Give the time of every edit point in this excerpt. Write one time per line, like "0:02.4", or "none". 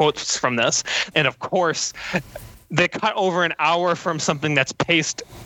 0:01.1